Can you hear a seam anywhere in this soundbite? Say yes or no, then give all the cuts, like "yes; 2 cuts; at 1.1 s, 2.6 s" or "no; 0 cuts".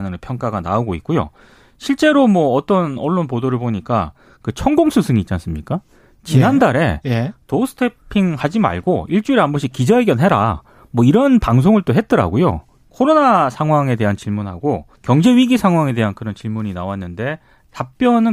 yes; 2 cuts; at 12.8 s, 14.9 s